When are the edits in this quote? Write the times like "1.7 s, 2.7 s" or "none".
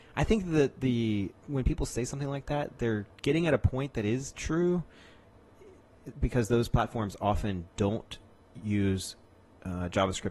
1.4 s